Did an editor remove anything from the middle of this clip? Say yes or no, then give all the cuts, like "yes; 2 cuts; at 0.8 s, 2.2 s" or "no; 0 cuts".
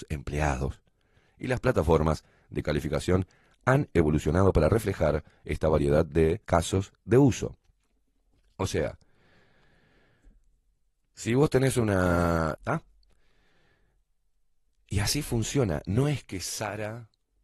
yes; 2 cuts; at 6.4 s, 12.5 s